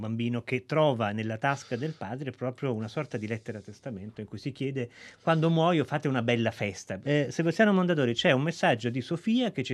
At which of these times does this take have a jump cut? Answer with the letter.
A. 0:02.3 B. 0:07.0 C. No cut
B